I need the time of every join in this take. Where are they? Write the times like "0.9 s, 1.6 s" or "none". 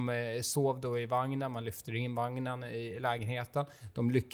none